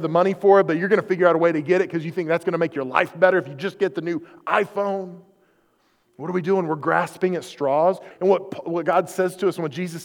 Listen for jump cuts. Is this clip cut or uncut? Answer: cut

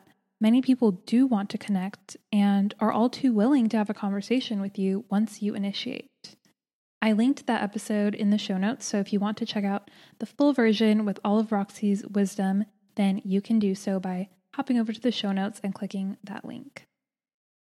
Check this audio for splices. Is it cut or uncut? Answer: uncut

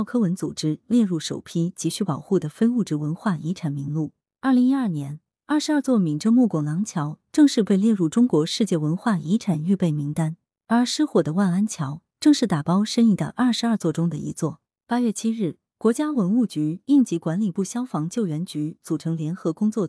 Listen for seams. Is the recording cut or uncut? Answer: uncut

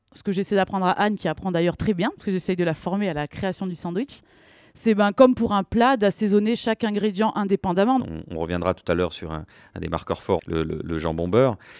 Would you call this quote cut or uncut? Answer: cut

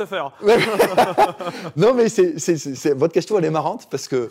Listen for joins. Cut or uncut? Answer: uncut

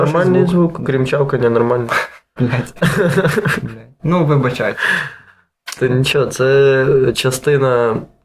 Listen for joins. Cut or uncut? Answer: uncut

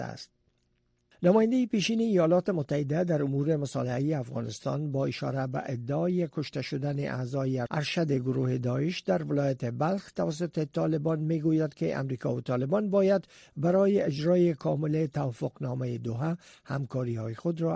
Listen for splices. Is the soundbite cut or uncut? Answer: uncut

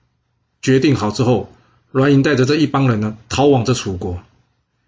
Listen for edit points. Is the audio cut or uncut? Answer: uncut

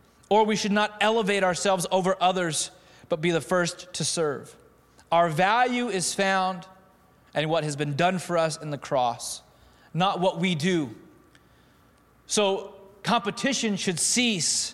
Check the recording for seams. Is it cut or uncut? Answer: uncut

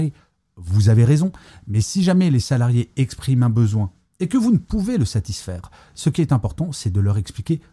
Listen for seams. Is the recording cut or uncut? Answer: uncut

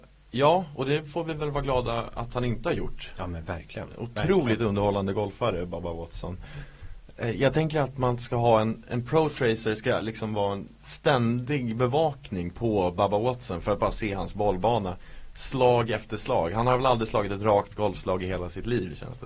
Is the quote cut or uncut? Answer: uncut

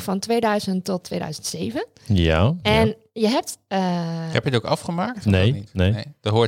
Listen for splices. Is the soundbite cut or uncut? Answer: uncut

